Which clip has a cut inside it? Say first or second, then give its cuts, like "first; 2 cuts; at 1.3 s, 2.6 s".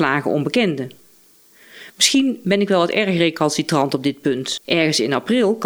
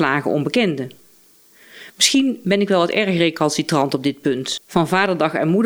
first; 1 cut; at 4.6 s